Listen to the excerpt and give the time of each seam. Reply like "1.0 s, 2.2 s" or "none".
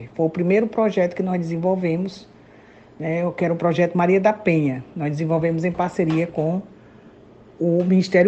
none